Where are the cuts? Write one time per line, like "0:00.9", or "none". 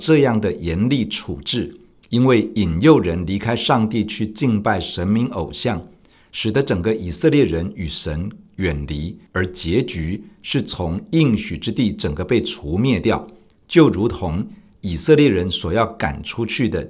0:06.3
0:09.3